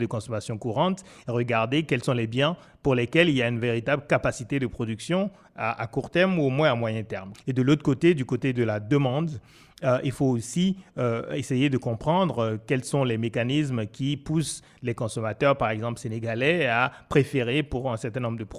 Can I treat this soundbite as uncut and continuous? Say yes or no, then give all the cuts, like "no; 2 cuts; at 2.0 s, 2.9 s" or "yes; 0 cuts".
no; 1 cut; at 7.3 s